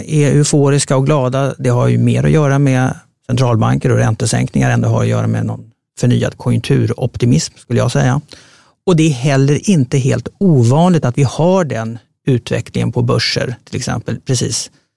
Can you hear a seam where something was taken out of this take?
no; 0 cuts

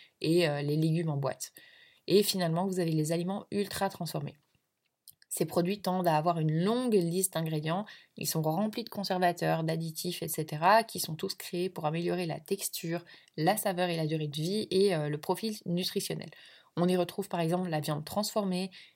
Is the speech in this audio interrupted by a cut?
no; 0 cuts

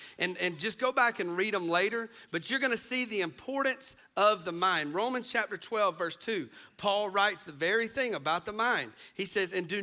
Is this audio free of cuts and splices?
yes; 0 cuts

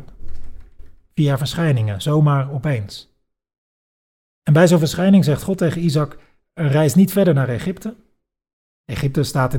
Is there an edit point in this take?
no; 0 cuts

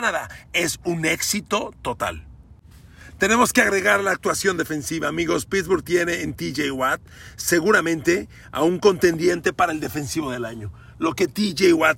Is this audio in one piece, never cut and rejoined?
yes; 0 cuts

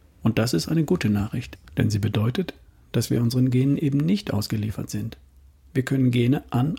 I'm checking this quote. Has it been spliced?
no; 0 cuts

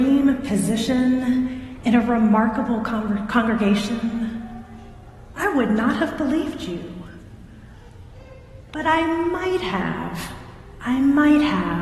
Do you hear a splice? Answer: yes; 1 cut; at 5.4 s

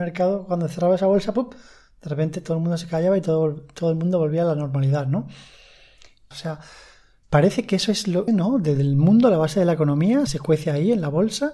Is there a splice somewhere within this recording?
yes; 3 cuts; at 6.3 s, 8.3 s, 10.3 s

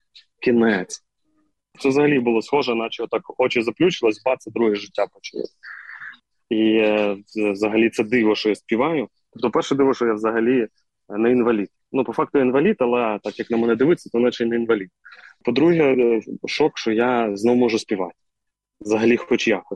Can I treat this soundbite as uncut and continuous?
yes; 0 cuts

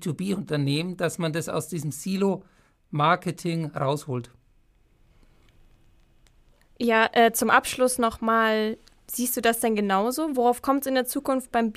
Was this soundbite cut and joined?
no; 0 cuts

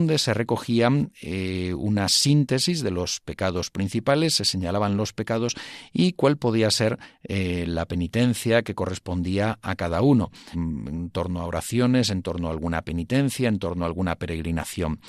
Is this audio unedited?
no; 1 cut; at 10.5 s

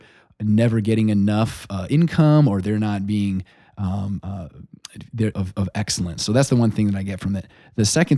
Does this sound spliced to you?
yes; 1 cut; at 5.3 s

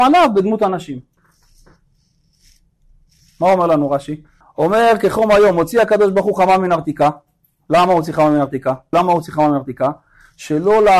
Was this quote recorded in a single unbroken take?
no; 2 cuts; at 4.4 s, 8.9 s

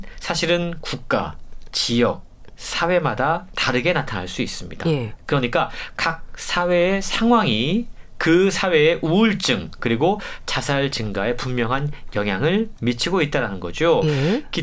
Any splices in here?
no; 0 cuts

